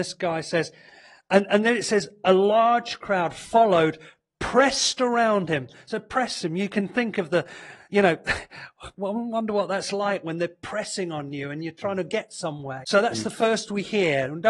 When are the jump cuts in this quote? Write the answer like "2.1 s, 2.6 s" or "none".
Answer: 12.8 s